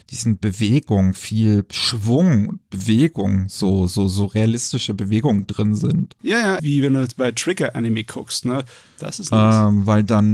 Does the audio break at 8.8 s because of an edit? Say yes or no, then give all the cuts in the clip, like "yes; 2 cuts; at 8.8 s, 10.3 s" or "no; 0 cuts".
yes; 2 cuts; at 6.6 s, 8.8 s